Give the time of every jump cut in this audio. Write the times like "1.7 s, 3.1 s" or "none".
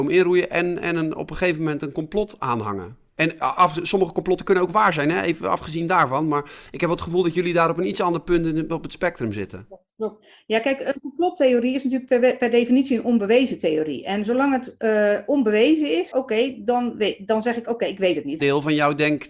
16.1 s, 18.4 s